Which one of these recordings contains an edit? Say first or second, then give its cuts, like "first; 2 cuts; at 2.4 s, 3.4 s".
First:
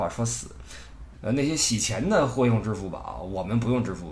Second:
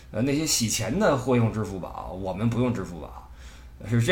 first; 1 cut; at 1.1 s